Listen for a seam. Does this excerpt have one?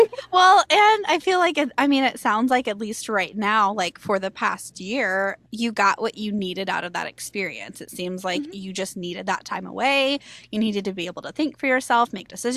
no; 0 cuts

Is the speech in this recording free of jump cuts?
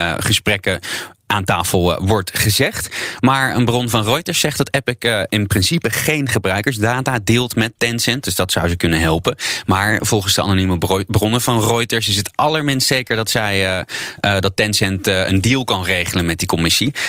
no; 1 cut; at 5.3 s

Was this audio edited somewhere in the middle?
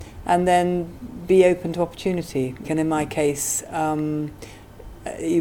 yes; 1 cut; at 2.6 s

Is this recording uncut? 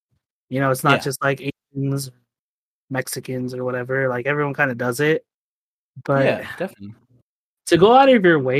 yes; 0 cuts

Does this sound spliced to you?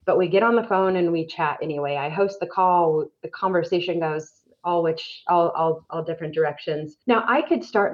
yes; 1 cut; at 7.0 s

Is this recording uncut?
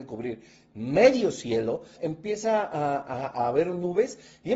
no; 1 cut; at 2.0 s

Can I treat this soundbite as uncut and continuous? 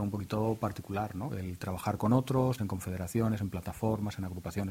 no; 2 cuts; at 1.3 s, 2.6 s

